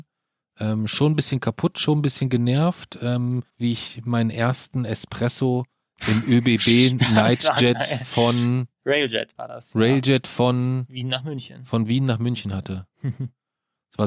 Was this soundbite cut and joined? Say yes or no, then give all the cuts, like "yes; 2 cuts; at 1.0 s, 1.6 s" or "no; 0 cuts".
yes; 1 cut; at 3.5 s